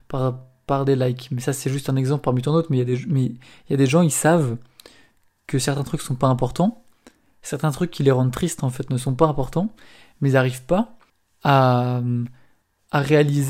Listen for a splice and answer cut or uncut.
uncut